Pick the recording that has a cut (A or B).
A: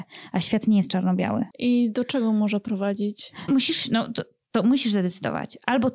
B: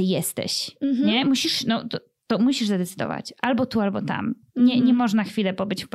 A